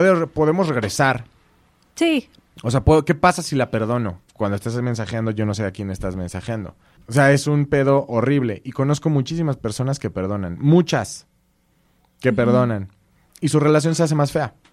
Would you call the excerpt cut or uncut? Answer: cut